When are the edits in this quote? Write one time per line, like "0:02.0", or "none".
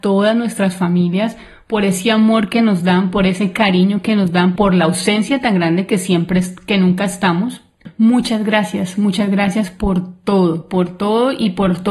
0:04.6